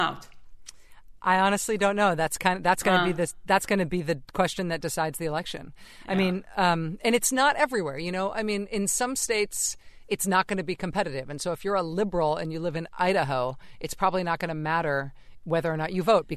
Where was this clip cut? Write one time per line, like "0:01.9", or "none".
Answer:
none